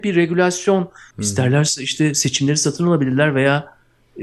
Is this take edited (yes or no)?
yes